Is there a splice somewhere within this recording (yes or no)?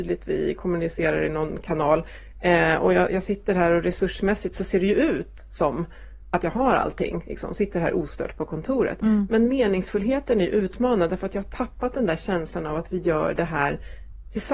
no